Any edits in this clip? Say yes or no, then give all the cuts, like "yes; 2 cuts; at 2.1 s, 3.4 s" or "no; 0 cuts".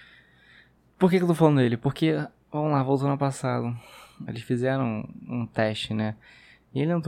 yes; 1 cut; at 4.3 s